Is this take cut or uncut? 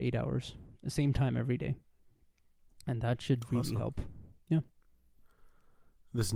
uncut